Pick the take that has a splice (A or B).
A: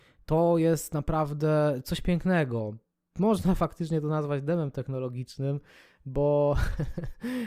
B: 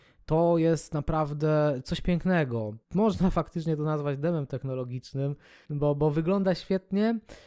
B